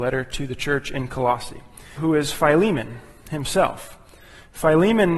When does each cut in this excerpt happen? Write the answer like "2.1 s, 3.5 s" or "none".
2.0 s